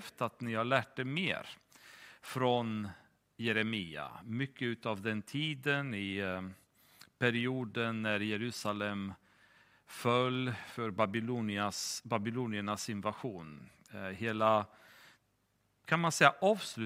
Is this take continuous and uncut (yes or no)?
yes